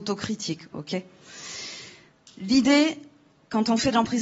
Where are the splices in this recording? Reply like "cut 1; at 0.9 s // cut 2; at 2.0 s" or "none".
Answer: none

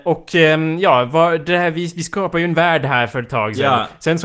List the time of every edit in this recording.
none

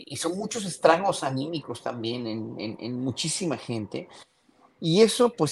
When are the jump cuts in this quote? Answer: none

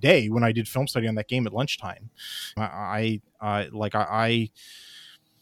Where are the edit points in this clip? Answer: cut 1; at 2.6 s

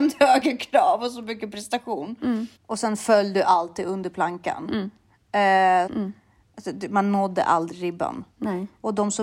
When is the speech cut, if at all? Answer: cut 1; at 2.6 s // cut 2; at 5.9 s

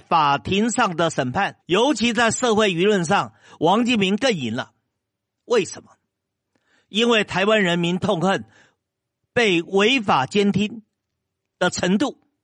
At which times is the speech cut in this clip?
cut 1; at 1.6 s

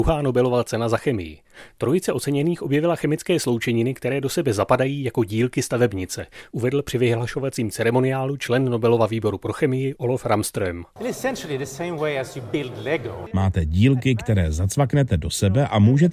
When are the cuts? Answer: cut 1; at 13.3 s

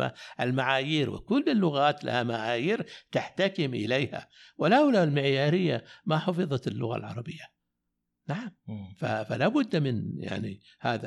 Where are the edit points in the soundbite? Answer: none

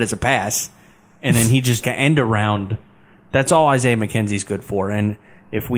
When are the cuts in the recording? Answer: cut 1; at 1.8 s

